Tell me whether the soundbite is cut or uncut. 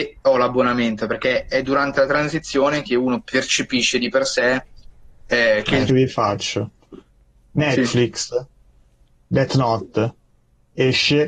cut